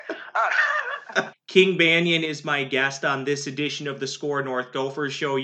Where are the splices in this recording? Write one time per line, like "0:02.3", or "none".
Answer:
0:01.3